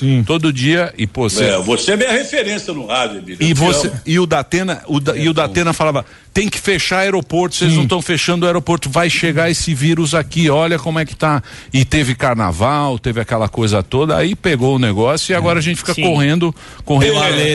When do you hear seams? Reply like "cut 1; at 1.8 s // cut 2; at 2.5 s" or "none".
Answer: none